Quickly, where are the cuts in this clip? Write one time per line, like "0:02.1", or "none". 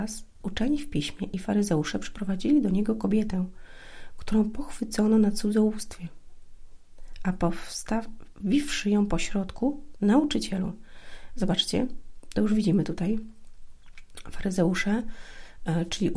0:09.9